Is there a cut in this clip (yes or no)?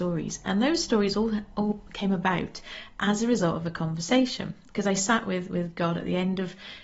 no